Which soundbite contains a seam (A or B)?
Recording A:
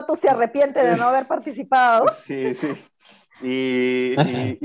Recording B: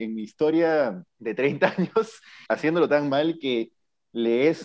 B